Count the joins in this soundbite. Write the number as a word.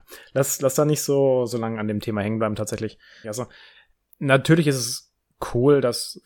one